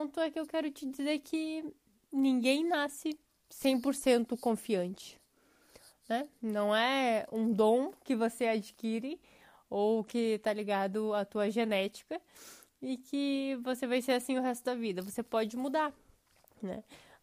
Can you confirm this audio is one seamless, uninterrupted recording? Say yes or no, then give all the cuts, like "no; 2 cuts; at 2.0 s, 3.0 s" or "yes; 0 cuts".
yes; 0 cuts